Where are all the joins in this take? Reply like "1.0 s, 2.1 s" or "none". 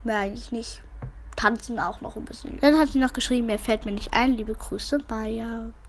2.6 s